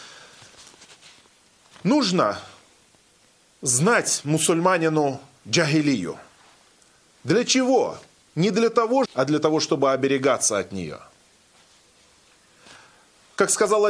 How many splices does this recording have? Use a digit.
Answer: 1